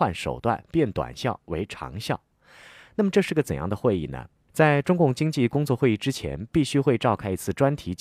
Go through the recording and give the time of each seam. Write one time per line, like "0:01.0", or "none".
0:04.5